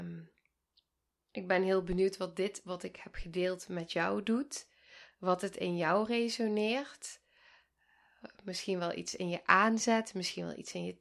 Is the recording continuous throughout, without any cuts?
yes; 0 cuts

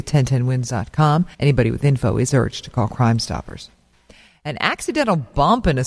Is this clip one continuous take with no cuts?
no; 1 cut; at 1.3 s

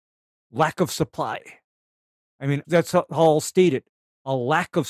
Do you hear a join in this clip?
yes; 1 cut; at 2.6 s

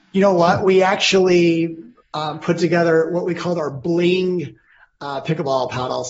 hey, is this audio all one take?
yes; 0 cuts

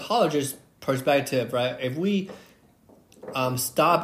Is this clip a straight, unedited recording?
yes; 0 cuts

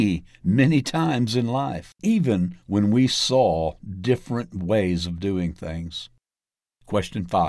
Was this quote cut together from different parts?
yes; 1 cut; at 2.0 s

